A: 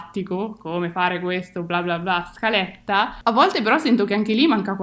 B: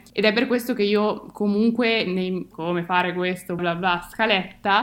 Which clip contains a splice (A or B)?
B